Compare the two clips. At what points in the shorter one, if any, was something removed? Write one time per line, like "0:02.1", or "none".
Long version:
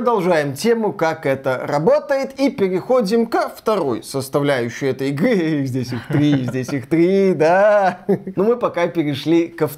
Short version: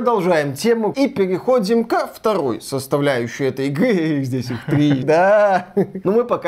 0:00.9
0:05.0